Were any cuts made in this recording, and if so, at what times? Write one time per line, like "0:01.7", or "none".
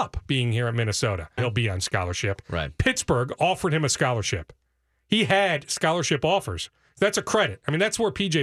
0:01.4